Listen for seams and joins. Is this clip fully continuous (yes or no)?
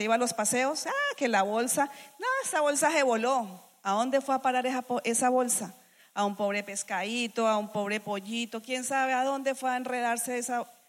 yes